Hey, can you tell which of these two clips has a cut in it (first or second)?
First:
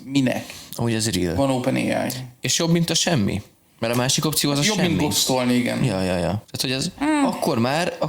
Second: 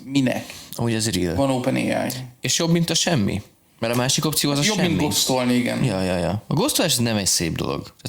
first